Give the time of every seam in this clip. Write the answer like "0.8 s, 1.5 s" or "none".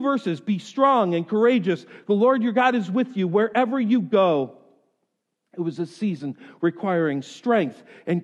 none